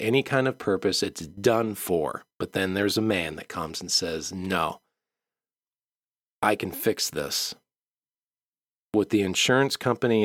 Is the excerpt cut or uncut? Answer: cut